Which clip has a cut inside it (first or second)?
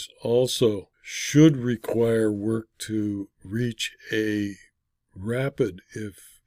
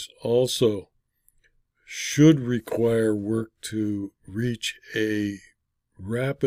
first